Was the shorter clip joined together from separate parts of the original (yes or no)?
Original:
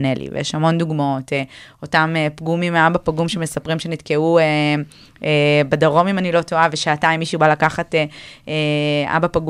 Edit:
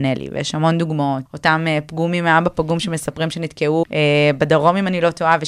yes